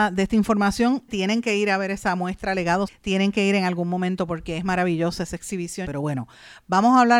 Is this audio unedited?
no; 3 cuts; at 1.1 s, 2.9 s, 5.8 s

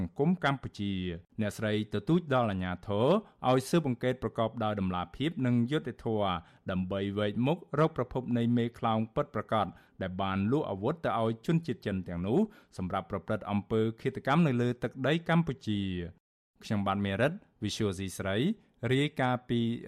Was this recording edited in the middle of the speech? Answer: yes; 1 cut; at 1.3 s

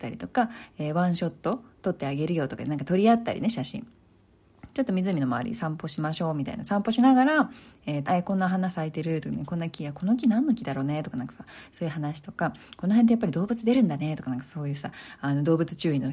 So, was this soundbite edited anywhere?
yes; 2 cuts; at 4.7 s, 8.1 s

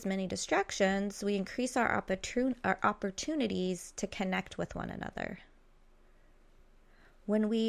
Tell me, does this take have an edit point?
no; 0 cuts

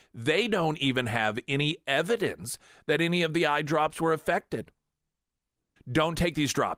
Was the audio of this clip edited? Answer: yes; 1 cut; at 5.8 s

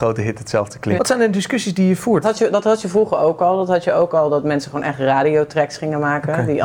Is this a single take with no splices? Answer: no; 2 cuts; at 1.0 s, 2.2 s

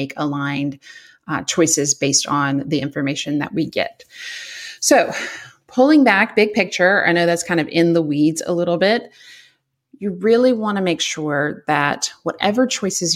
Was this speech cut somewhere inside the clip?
no; 0 cuts

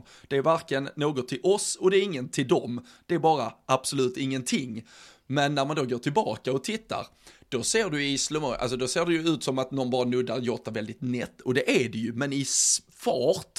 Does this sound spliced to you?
no; 0 cuts

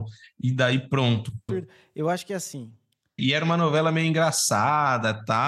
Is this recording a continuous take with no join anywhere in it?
no; 2 cuts; at 1.5 s, 3.2 s

